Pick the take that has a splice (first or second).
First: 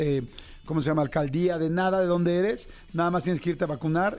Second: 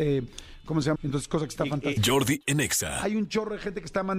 second